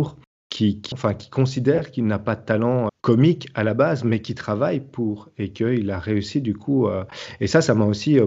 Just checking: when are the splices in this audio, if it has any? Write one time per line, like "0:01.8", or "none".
0:00.9
0:02.9